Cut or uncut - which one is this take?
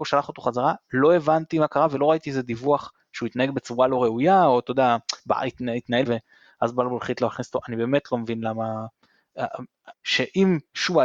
cut